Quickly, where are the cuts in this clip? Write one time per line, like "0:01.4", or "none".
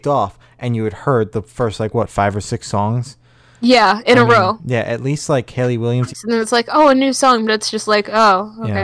0:06.1